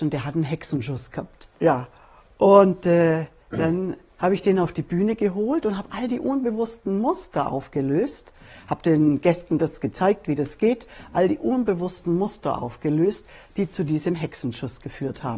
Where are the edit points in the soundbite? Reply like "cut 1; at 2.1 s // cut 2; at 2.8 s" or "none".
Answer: cut 1; at 1.5 s

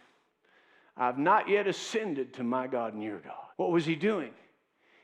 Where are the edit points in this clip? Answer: cut 1; at 3.5 s

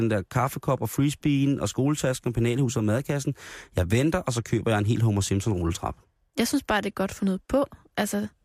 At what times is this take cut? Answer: none

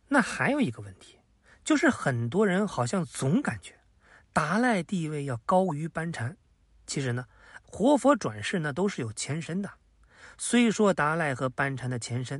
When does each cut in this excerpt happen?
cut 1; at 7.6 s

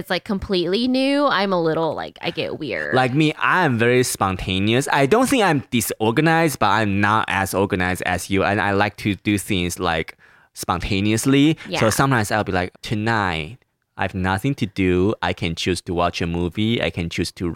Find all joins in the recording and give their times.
cut 1; at 12.7 s

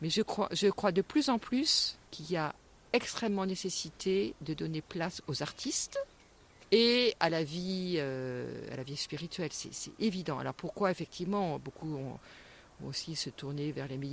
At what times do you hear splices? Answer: cut 1; at 2.1 s

